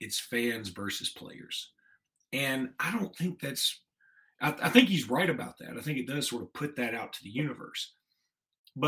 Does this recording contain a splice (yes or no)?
no